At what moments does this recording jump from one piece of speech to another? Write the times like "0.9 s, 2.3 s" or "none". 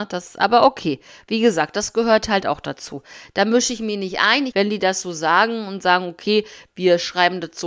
4.5 s